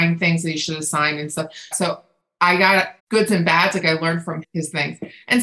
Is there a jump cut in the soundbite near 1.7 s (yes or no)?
yes